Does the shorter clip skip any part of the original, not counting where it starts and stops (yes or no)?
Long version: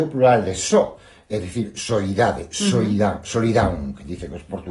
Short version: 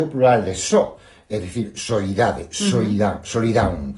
no